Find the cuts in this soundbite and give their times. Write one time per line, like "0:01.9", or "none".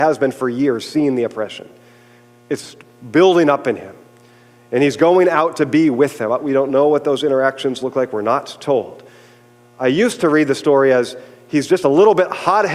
none